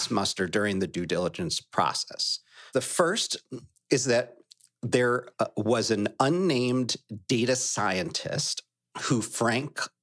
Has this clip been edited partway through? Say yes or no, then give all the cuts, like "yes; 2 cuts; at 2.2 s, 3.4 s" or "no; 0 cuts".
yes; 1 cut; at 2.7 s